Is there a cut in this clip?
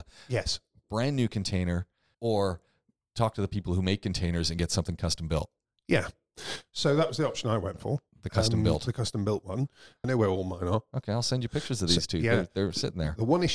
yes; 2 cuts; at 2.1 s, 10.0 s

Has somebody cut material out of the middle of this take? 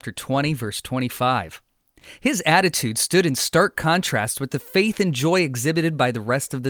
no; 0 cuts

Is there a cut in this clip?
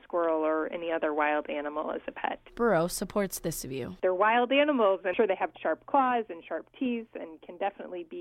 yes; 2 cuts; at 2.5 s, 5.5 s

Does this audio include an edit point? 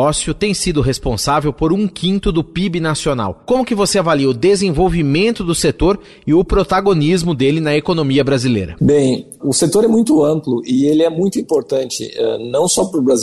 yes; 1 cut; at 9.4 s

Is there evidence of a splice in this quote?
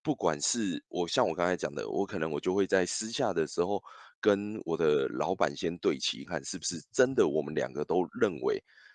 yes; 1 cut; at 6.3 s

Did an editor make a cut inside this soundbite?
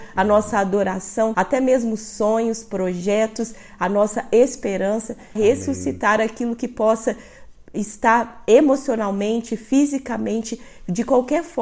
yes; 2 cuts; at 1.3 s, 5.4 s

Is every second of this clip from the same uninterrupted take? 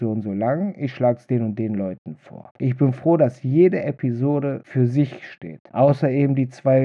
no; 1 cut; at 2.5 s

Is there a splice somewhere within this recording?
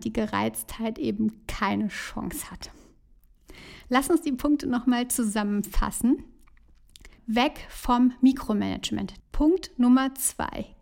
yes; 2 cuts; at 7.2 s, 9.2 s

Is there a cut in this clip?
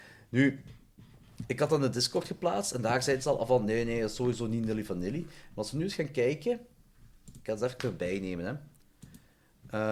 no; 0 cuts

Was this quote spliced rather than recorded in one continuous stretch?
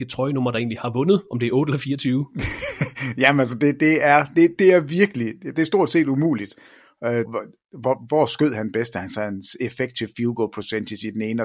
yes; 1 cut; at 7.3 s

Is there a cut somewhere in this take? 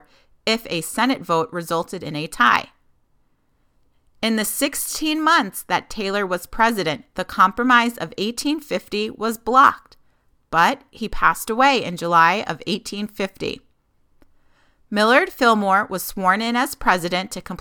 no; 0 cuts

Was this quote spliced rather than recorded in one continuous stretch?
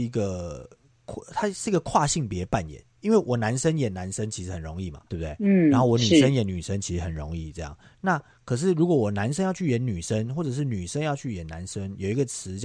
yes; 1 cut; at 5.1 s

